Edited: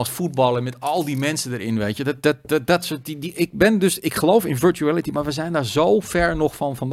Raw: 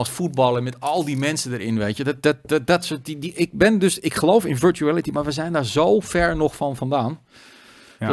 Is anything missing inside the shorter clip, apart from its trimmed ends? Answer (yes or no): no